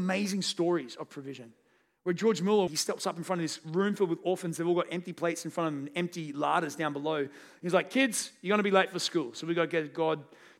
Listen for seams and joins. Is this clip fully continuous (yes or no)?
no